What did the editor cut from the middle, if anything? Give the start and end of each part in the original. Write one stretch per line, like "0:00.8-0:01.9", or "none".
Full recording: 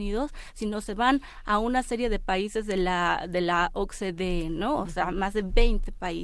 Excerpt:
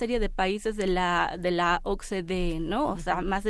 none